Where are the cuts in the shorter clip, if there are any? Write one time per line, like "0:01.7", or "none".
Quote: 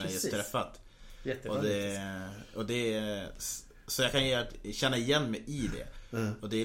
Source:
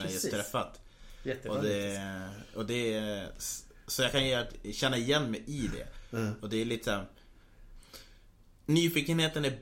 none